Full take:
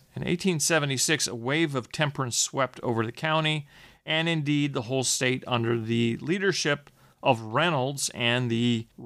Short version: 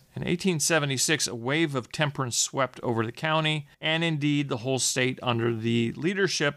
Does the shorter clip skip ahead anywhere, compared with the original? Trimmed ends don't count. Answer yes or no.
yes